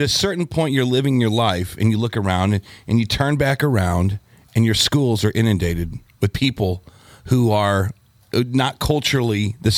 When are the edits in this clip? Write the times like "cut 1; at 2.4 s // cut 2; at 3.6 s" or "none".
none